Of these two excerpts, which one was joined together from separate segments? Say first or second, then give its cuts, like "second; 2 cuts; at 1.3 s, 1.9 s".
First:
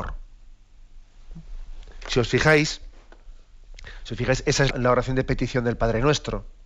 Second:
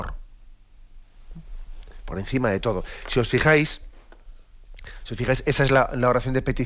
first; 2 cuts; at 2.0 s, 4.7 s